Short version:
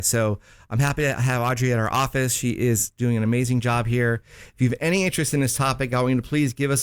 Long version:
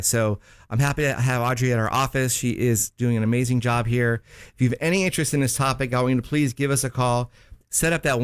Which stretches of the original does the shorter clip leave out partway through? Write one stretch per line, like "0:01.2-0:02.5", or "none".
none